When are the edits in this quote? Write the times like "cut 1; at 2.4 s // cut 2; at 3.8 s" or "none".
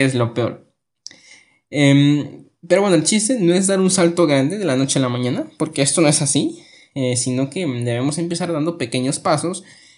none